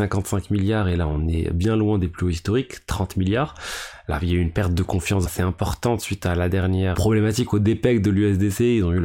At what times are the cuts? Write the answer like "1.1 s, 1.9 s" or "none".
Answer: 5.3 s, 6.9 s